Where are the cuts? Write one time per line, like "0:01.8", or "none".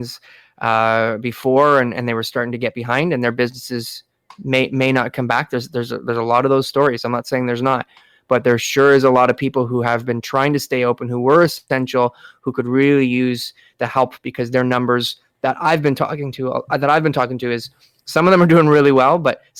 none

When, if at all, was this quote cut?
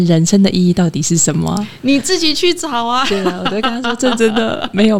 none

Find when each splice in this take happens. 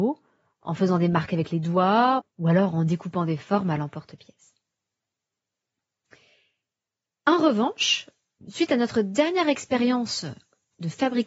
0:02.2
0:08.4

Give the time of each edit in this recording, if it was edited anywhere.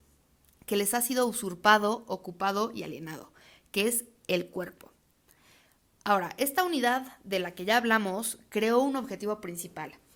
none

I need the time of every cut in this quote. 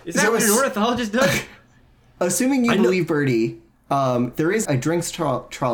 0:04.6

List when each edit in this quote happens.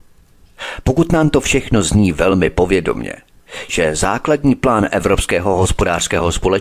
0:03.7

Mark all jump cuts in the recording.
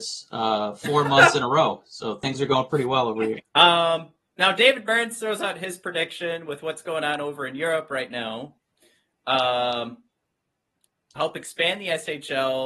0:03.4
0:11.2

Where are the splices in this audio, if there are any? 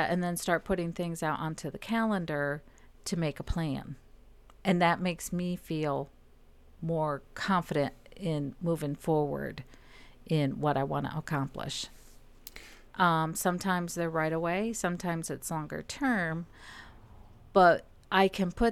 0:12.9

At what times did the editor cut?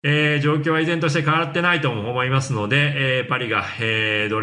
none

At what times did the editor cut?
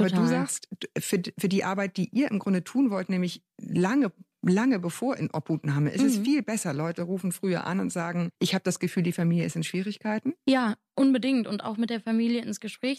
0:08.3

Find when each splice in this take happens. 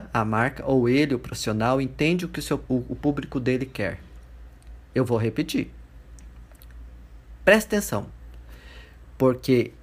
0:02.7

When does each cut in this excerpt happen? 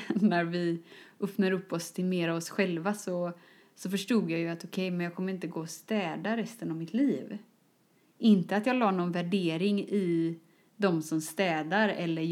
none

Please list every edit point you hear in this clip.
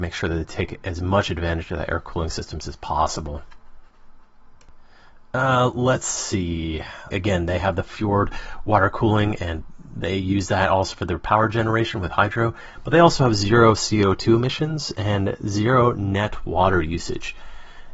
0:07.1

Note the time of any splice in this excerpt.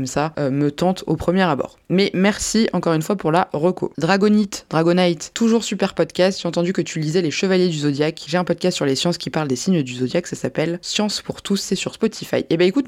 none

